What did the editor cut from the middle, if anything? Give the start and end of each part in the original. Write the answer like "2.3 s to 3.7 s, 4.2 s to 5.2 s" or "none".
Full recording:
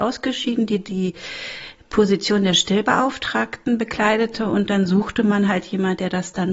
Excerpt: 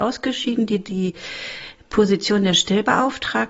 none